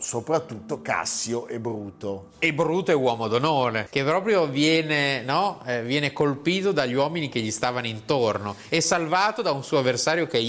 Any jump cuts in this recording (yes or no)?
yes